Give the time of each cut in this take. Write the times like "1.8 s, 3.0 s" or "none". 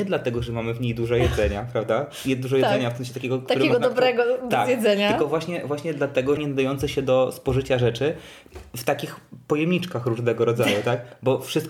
6.4 s